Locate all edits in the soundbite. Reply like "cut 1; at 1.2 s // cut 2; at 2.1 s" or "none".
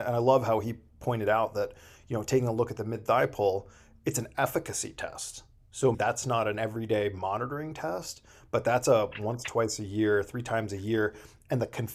cut 1; at 5.9 s